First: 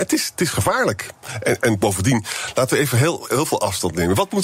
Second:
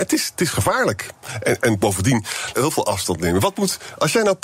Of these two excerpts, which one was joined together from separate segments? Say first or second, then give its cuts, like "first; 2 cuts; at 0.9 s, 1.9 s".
second; 1 cut; at 2.5 s